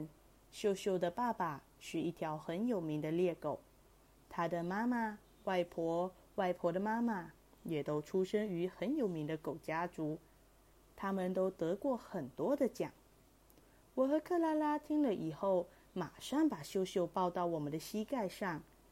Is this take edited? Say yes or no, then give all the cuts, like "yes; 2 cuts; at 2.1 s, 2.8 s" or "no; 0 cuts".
yes; 1 cut; at 4.2 s